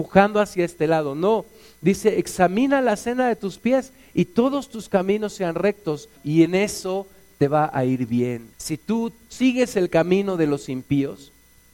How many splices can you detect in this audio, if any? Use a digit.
2